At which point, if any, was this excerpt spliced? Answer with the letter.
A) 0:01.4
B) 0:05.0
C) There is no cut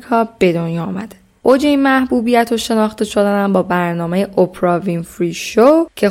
A